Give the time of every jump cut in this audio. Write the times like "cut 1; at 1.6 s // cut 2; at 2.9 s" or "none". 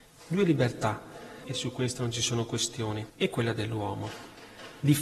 cut 1; at 1.4 s // cut 2; at 3.1 s